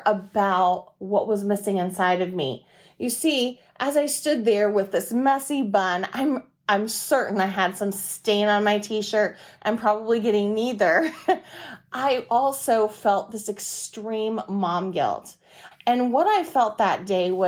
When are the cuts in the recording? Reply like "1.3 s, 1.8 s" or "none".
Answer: 9.6 s, 15.7 s